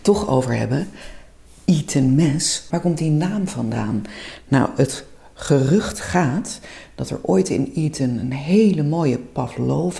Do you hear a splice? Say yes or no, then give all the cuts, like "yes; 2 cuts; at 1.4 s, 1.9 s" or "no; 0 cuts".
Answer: yes; 1 cut; at 2.7 s